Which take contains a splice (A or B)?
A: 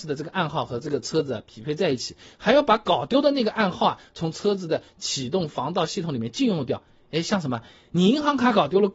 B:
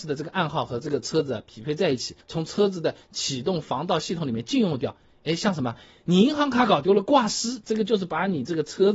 B